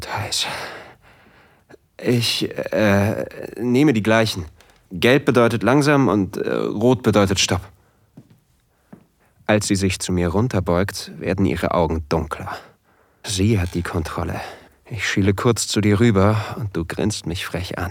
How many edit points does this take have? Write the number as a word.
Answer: three